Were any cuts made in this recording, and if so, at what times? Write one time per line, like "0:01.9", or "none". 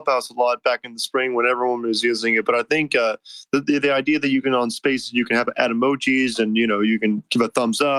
none

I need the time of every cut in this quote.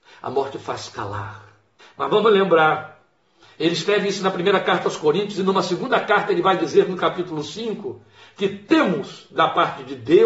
0:01.8

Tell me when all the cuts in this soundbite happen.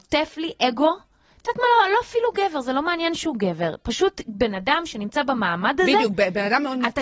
none

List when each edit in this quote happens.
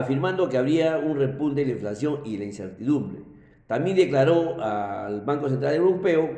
none

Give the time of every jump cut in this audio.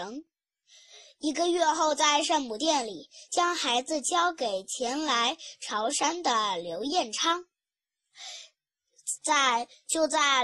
0:09.2

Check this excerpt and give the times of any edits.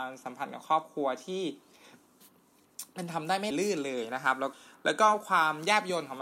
0:03.5

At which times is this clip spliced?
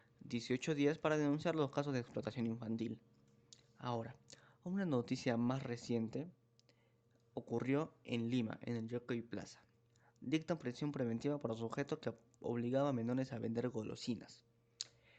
none

